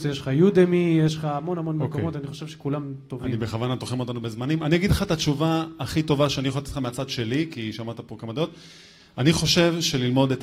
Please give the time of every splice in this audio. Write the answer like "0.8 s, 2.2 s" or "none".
none